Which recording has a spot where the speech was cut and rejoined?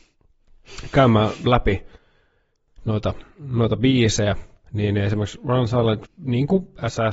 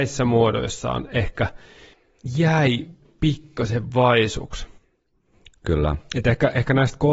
first; 1 cut; at 6.0 s

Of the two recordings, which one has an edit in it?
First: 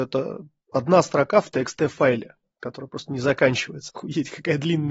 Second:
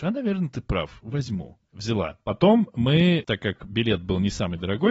first; 1 cut; at 3.9 s

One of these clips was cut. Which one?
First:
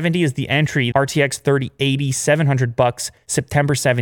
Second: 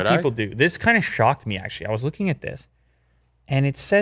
first; 1 cut; at 0.9 s

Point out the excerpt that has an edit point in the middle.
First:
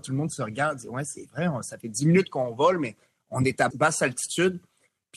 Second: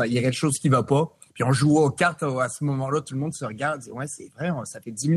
first; 1 cut; at 3.7 s

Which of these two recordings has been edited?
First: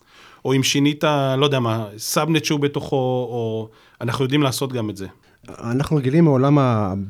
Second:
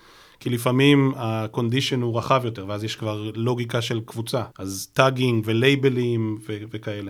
second; 1 cut; at 4.5 s

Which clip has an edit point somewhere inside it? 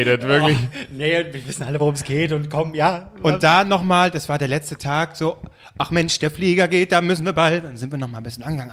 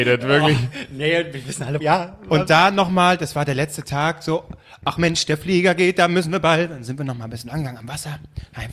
second; 1 cut; at 1.8 s

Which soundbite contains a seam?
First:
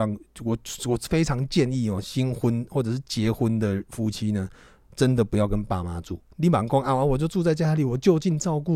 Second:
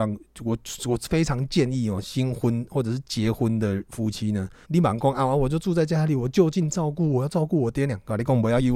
second; 1 cut; at 4.6 s

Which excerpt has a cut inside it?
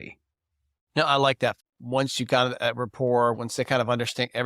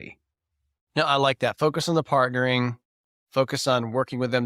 first; 2 cuts; at 1.6 s, 3.3 s

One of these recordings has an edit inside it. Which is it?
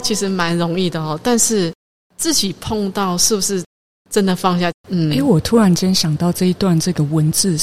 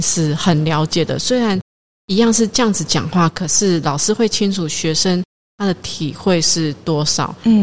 first; 1 cut; at 4.7 s

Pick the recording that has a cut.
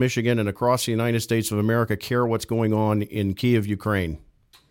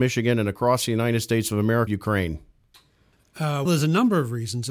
second; 2 cuts; at 1.9 s, 3.6 s

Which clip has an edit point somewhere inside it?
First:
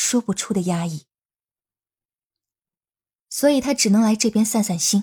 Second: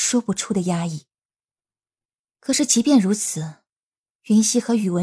second; 1 cut; at 2.2 s

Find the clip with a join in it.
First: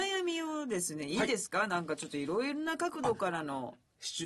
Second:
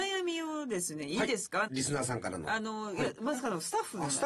second; 1 cut; at 1.7 s

